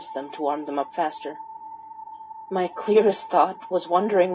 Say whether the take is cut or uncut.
uncut